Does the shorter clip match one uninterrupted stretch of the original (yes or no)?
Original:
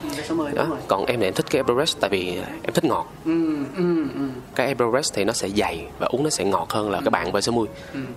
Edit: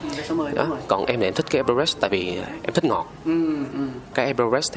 no